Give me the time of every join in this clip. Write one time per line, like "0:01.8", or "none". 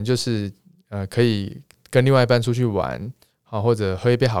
none

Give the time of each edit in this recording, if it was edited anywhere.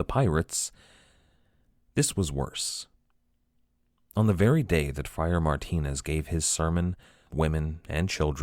0:07.3

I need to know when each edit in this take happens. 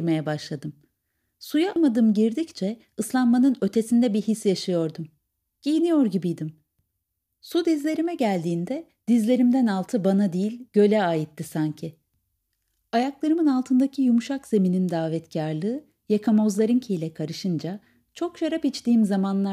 0:01.8

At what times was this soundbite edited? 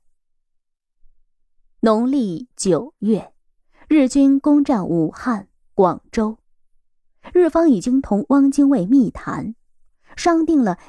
none

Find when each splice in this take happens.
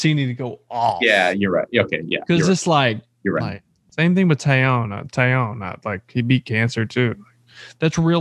0:03.4

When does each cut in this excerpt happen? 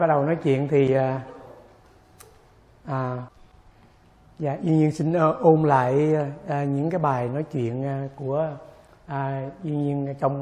none

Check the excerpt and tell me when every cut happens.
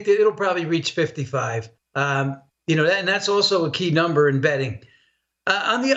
none

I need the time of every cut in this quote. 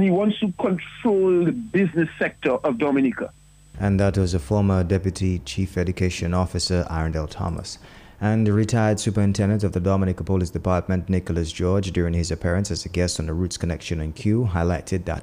0:03.7

